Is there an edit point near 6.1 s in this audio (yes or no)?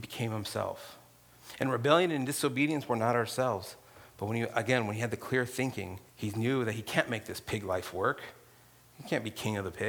yes